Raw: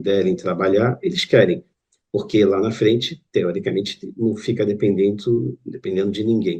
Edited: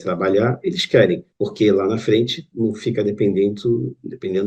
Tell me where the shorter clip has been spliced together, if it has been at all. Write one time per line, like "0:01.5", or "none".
0:01.3
0:02.5